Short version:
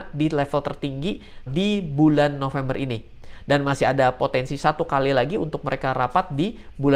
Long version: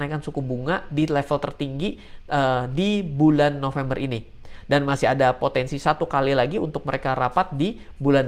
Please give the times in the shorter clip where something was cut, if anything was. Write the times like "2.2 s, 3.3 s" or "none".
1.5 s